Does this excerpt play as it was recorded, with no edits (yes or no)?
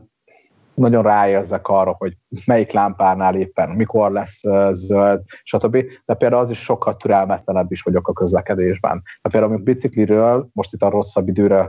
yes